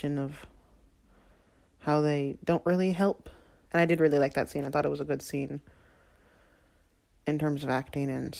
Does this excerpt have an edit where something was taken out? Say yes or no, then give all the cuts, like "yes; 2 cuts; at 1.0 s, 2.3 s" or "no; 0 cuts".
yes; 1 cut; at 3.7 s